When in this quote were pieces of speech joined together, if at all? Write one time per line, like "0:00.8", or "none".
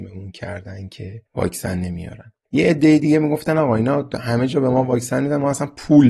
0:01.3